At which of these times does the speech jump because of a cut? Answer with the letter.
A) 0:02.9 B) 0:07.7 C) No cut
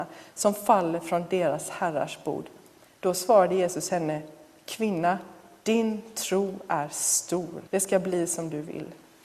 B